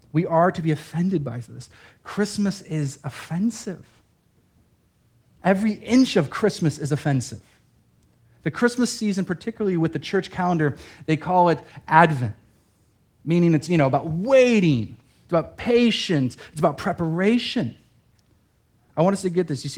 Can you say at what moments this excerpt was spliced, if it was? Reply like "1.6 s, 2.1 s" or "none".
none